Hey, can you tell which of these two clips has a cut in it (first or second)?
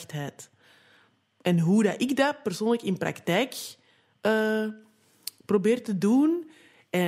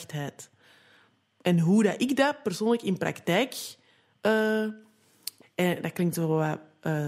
second